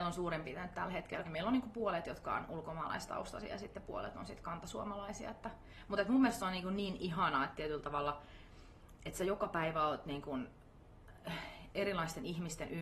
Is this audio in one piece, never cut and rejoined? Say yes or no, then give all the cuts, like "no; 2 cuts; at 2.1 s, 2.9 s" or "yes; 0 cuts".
no; 1 cut; at 1.2 s